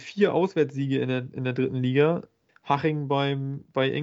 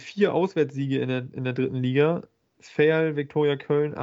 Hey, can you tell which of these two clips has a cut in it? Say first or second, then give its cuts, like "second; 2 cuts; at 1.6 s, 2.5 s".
first; 1 cut; at 2.5 s